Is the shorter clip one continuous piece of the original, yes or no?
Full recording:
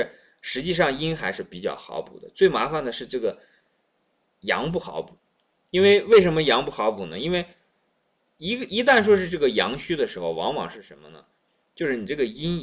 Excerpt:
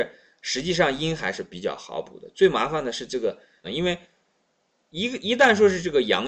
no